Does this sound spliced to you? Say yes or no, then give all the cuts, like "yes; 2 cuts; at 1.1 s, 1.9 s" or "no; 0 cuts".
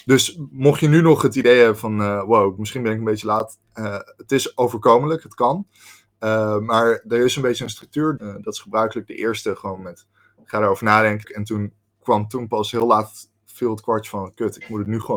yes; 2 cuts; at 8.2 s, 11.2 s